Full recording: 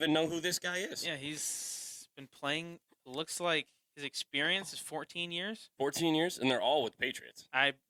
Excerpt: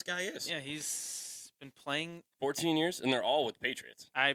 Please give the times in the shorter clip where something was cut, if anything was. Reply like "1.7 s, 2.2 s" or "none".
2.3 s

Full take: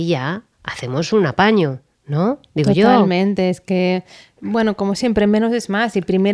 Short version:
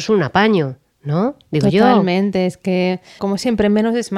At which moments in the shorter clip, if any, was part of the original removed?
3.2 s

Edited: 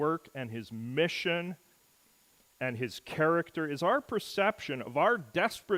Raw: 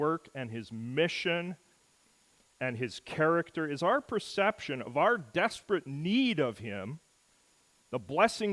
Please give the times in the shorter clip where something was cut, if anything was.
none

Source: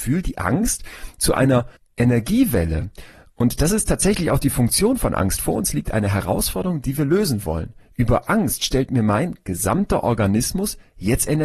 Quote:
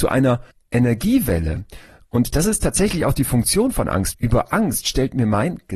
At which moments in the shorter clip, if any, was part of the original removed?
4.1 s

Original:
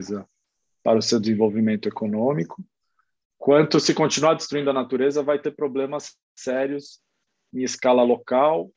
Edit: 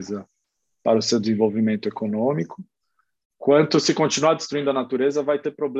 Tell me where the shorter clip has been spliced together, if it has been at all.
none

